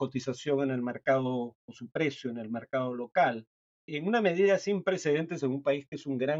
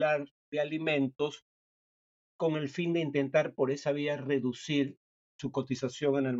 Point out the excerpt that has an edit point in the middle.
first; 1 cut; at 3.6 s

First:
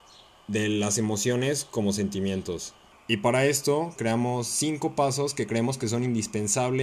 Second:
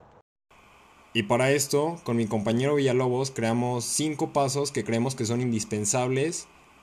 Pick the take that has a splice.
first; 2 cuts; at 2.9 s, 4.0 s

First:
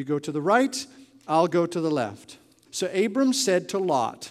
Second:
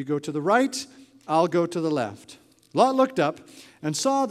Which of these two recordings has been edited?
first; 1 cut; at 2.6 s

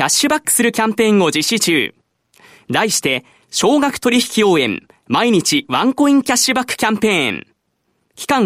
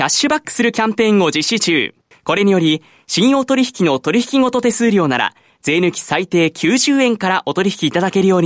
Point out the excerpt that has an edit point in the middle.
second; 1 cut; at 2.1 s

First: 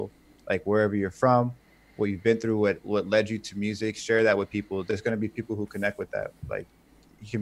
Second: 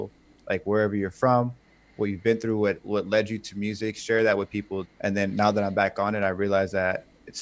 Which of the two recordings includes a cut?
second; 1 cut; at 4.8 s

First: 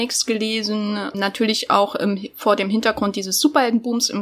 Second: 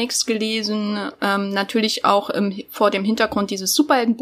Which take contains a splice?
first; 1 cut; at 1.1 s

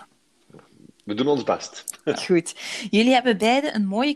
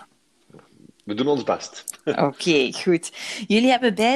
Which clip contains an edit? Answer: first; 1 cut; at 2.1 s

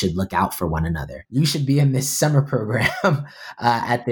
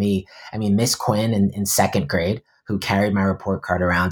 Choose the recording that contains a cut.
first; 1 cut; at 1.3 s

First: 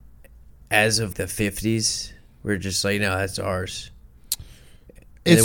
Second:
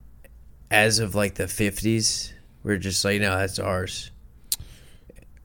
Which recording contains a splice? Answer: first; 1 cut; at 1.1 s

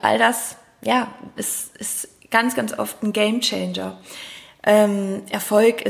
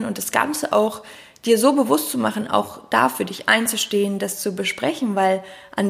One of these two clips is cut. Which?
first; 1 cut; at 1.4 s

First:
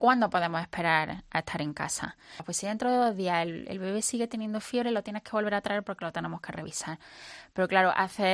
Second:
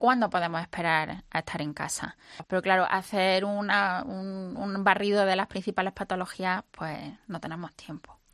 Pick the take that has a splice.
second; 1 cut; at 2.4 s

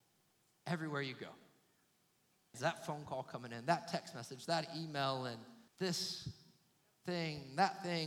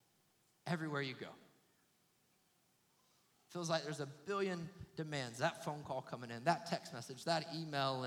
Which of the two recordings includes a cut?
first; 2 cuts; at 2.5 s, 5.7 s

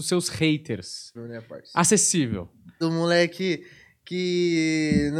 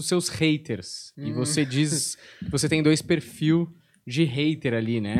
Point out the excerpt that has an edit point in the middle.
first; 2 cuts; at 1.1 s, 2.8 s

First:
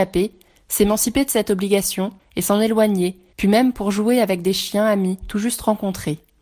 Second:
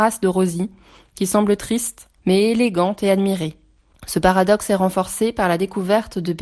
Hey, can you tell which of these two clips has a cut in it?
second; 1 cut; at 2.2 s

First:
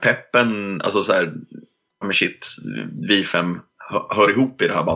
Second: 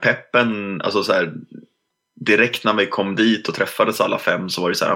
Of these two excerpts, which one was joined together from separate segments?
first; 1 cut; at 2.0 s

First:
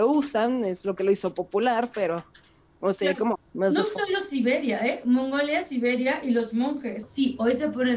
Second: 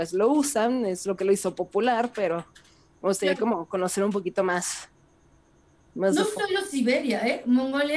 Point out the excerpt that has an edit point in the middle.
first; 2 cuts; at 3.3 s, 7.0 s

